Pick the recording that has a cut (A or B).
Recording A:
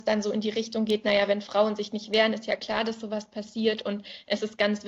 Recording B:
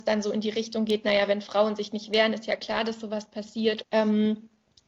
B